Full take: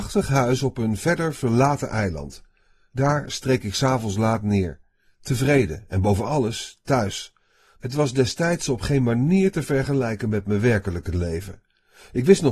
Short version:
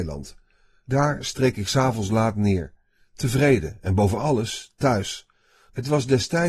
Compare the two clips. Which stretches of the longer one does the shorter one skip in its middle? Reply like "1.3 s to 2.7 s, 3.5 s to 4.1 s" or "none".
none